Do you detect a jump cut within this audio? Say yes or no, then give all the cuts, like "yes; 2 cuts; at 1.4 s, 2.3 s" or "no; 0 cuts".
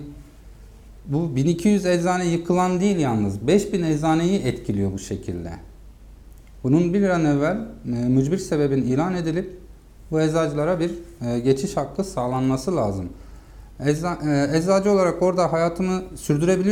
no; 0 cuts